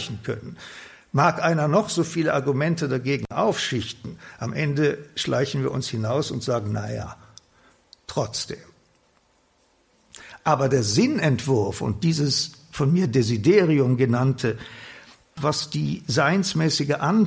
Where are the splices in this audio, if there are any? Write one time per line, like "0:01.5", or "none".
0:15.4